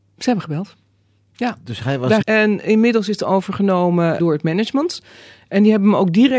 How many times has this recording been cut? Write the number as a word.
two